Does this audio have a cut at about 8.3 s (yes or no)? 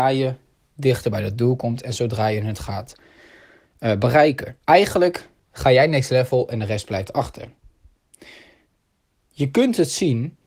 no